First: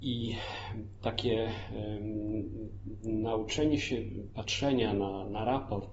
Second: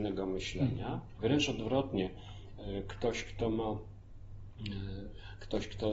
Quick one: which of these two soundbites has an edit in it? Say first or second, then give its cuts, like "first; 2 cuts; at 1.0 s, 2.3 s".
second; 1 cut; at 1.2 s